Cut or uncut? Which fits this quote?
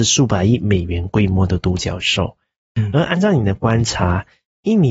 uncut